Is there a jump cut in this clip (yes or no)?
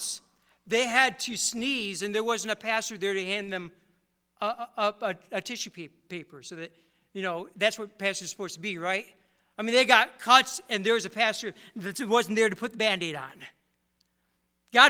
no